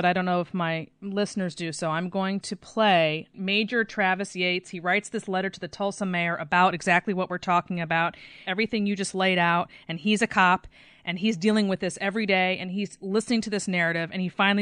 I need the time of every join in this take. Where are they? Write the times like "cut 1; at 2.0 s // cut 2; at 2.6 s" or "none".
cut 1; at 8.4 s